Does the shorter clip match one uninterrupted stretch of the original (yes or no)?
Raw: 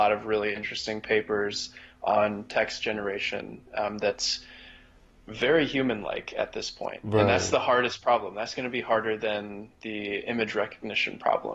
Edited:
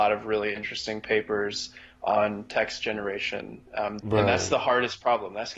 no